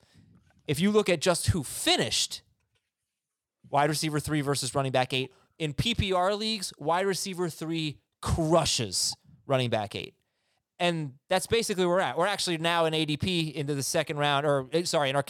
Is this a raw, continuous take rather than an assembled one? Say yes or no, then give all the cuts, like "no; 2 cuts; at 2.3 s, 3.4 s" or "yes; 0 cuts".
yes; 0 cuts